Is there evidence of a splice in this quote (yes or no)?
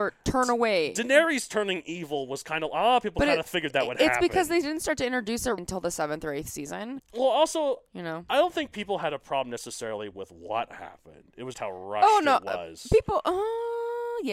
yes